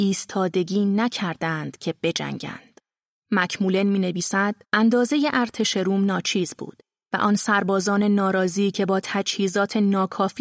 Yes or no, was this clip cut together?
yes